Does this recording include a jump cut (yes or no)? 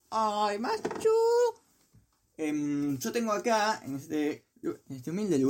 yes